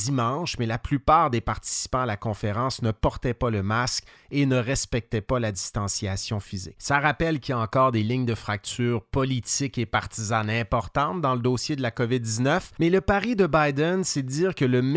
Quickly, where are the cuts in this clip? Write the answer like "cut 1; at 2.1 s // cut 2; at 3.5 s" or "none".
none